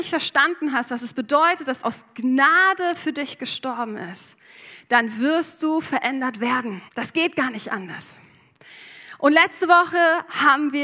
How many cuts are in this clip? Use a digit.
2